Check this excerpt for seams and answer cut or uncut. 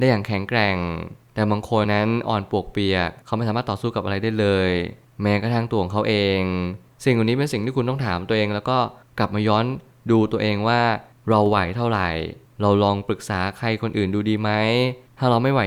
cut